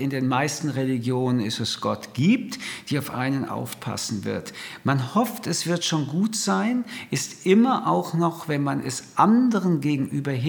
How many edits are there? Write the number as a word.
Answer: zero